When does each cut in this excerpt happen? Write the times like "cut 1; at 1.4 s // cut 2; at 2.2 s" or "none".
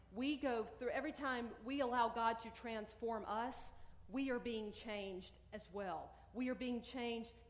none

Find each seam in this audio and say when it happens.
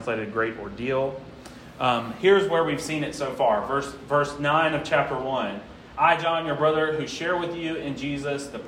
none

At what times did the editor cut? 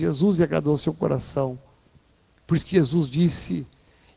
cut 1; at 2.3 s

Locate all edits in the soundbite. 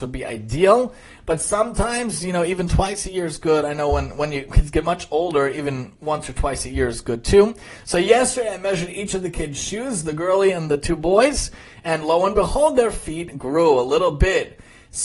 none

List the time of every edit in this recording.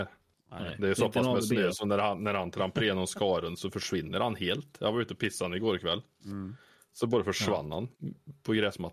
none

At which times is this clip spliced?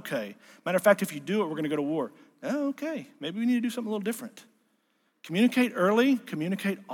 none

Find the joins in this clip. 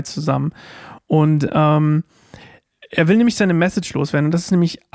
none

